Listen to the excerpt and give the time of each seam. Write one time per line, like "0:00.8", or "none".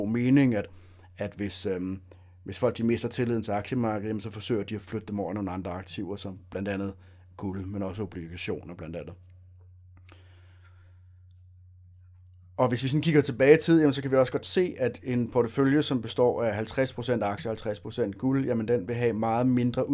none